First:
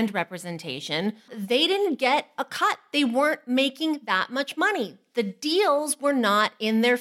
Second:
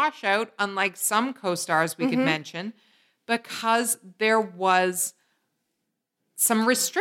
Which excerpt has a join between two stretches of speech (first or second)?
first